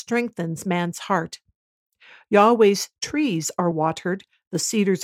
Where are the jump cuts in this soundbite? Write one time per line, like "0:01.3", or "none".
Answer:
0:03.7